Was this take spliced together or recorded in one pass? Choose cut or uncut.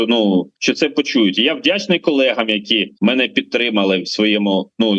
uncut